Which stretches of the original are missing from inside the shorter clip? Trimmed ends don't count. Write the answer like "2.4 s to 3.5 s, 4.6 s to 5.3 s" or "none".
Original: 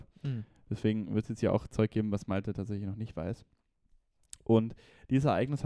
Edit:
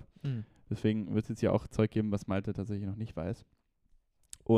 none